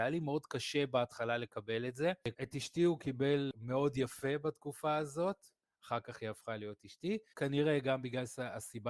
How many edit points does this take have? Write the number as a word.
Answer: two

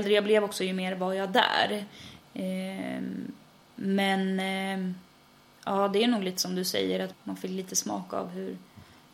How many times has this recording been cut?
one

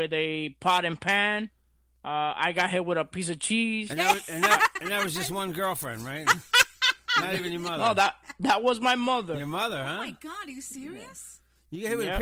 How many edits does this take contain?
zero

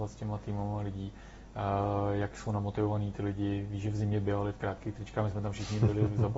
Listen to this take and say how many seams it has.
zero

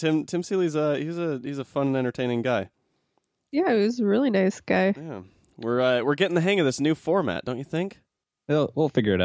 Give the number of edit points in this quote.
zero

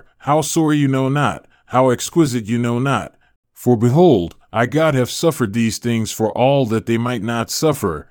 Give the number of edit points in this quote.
one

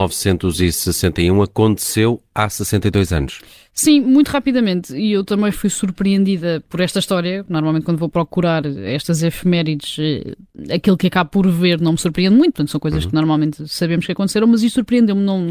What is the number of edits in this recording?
zero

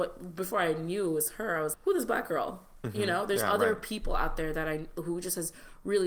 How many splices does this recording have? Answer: one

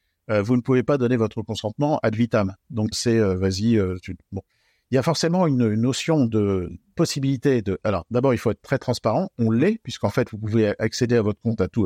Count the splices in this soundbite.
one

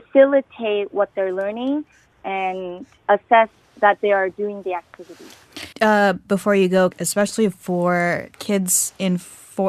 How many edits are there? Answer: three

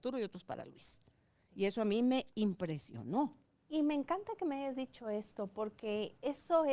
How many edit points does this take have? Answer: one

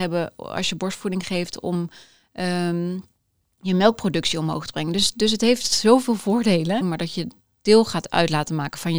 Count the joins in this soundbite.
one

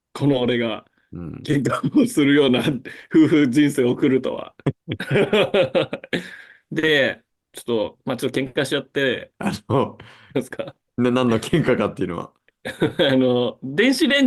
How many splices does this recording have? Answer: three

